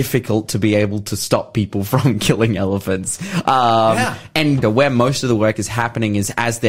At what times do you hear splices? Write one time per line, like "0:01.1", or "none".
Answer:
0:04.6